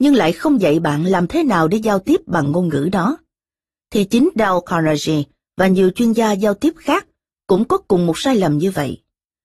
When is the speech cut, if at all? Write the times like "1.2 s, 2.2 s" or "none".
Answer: none